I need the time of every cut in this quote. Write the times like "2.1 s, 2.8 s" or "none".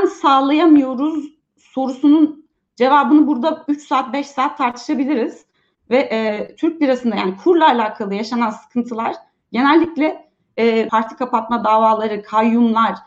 5.7 s, 10.9 s